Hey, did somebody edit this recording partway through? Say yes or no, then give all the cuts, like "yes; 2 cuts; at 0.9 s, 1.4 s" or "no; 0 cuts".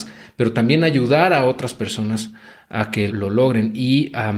yes; 1 cut; at 3.1 s